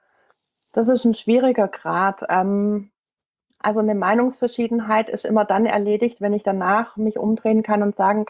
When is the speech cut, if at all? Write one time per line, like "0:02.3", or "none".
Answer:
none